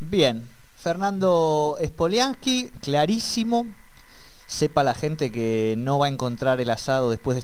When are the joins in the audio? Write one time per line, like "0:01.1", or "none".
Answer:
0:02.7